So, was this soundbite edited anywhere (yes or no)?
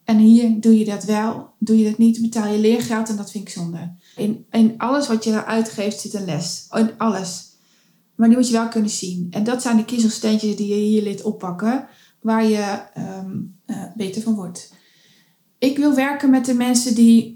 yes